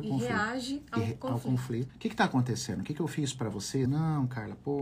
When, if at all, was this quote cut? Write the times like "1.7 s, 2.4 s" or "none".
1.9 s, 3.9 s